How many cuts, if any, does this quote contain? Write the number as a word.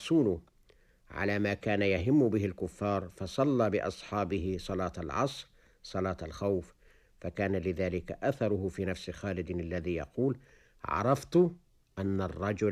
zero